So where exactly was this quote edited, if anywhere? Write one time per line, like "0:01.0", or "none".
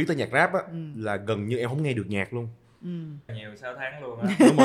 0:03.3